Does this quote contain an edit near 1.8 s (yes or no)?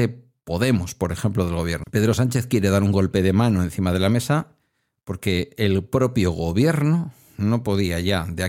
yes